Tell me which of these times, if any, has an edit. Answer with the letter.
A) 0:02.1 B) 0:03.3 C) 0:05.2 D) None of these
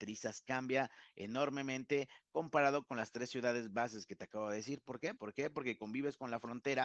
C